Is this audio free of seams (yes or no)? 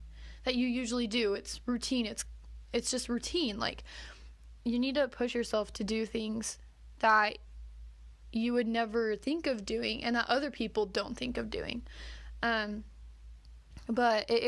yes